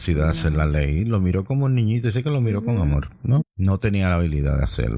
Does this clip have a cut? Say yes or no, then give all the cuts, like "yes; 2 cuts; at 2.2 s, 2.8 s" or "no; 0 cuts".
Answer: yes; 1 cut; at 3.4 s